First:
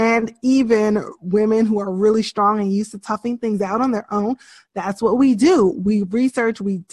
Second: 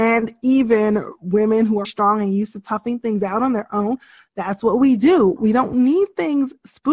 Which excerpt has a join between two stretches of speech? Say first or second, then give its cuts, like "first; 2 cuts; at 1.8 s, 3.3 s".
second; 2 cuts; at 1.8 s, 5.4 s